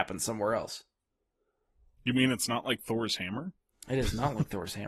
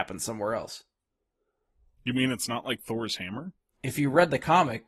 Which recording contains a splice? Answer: second; 1 cut; at 3.8 s

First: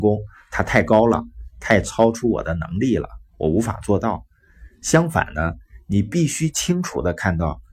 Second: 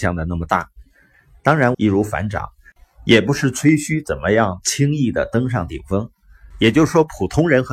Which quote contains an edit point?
second; 2 cuts; at 1.7 s, 6.5 s

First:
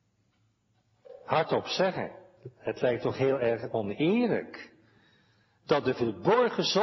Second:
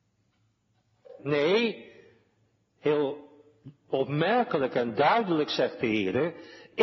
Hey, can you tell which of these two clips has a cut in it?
second; 1 cut; at 1.2 s

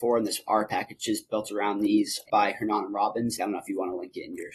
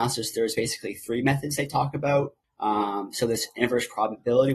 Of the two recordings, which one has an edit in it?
first; 2 cuts; at 2.3 s, 3.4 s

